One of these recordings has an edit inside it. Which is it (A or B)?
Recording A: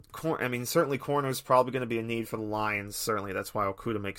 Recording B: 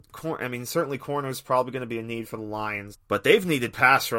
B